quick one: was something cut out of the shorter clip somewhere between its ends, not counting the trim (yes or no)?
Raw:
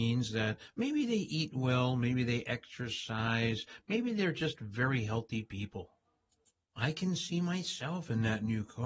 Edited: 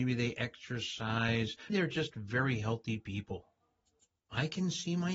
yes